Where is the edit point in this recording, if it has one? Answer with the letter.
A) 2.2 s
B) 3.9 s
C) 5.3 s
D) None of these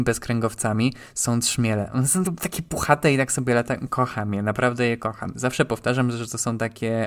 A